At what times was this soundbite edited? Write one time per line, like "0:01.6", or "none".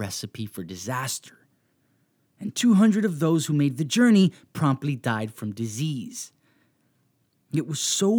none